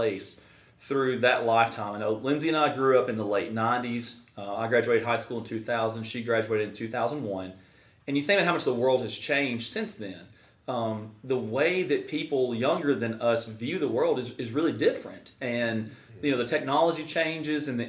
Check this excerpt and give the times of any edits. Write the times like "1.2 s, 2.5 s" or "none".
none